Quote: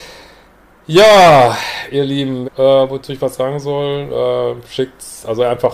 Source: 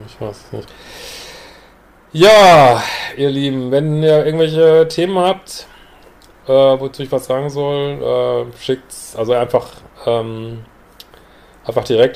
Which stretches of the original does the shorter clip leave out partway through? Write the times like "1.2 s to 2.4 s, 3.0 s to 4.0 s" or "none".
3.7 s to 6.3 s